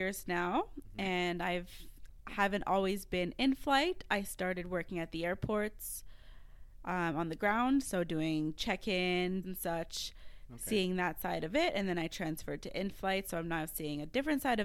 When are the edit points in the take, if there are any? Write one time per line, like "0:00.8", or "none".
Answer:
0:09.4